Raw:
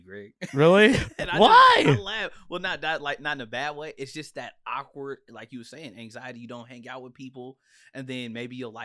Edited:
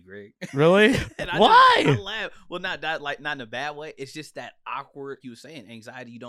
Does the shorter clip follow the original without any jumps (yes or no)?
no